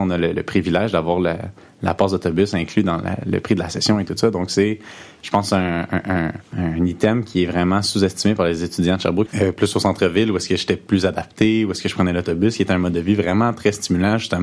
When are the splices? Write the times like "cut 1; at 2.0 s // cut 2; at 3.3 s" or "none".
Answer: cut 1; at 9.3 s